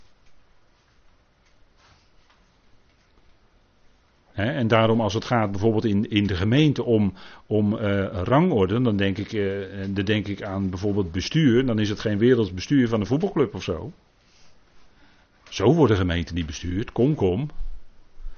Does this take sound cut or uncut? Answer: uncut